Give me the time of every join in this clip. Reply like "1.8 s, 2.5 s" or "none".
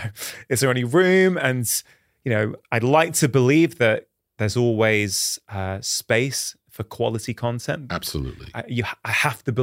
2.6 s